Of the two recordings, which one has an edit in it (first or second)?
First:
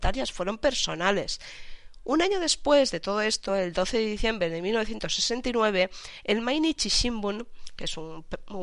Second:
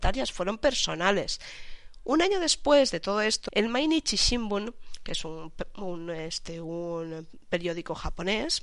second